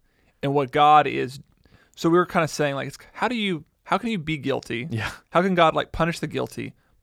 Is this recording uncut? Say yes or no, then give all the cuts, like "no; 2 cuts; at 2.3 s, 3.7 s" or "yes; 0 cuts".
yes; 0 cuts